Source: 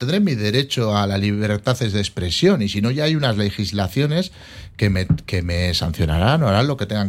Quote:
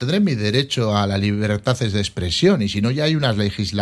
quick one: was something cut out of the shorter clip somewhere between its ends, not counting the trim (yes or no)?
no